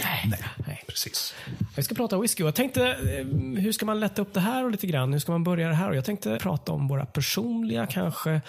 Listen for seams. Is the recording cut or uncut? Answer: cut